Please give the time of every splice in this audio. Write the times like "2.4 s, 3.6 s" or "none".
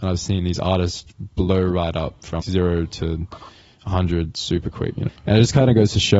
2.4 s, 5.1 s